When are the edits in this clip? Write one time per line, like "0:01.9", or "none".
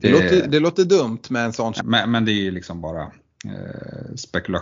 0:01.8